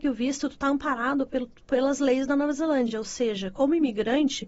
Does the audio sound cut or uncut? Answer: uncut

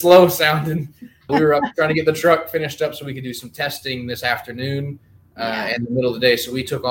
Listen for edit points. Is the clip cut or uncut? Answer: cut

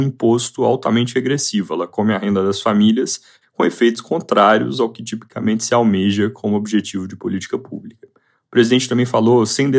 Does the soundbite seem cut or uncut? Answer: cut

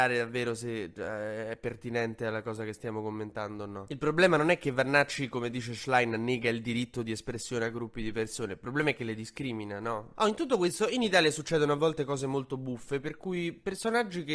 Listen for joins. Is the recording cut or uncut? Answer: uncut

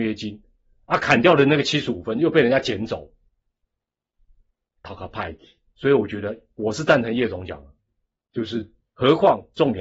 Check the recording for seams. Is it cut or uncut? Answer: cut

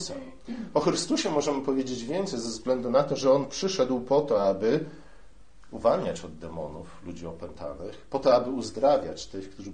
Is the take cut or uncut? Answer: uncut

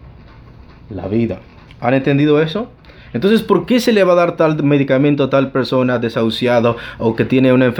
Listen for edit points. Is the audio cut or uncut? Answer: uncut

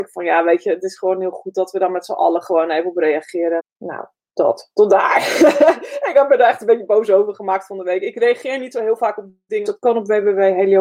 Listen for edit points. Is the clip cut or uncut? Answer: cut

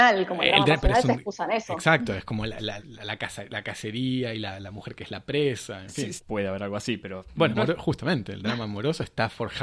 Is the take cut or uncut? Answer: cut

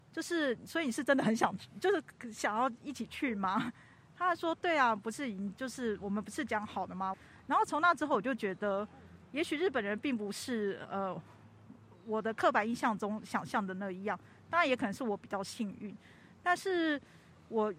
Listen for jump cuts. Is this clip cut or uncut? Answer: cut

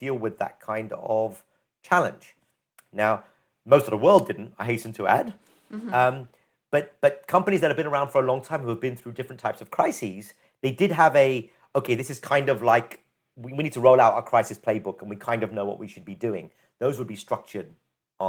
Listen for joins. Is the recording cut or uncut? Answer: uncut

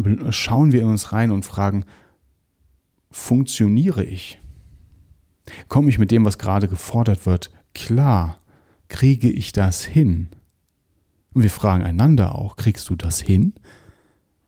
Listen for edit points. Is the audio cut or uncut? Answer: uncut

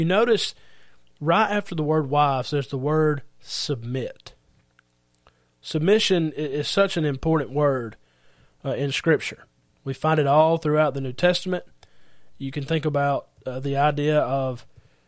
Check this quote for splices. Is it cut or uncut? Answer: uncut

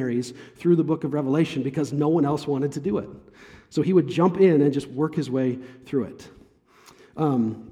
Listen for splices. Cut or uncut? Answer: uncut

